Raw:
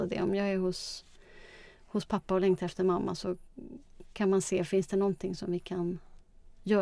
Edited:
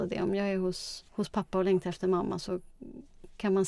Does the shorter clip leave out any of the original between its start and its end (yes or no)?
yes